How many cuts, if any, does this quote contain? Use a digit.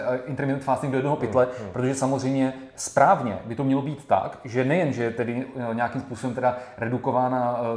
0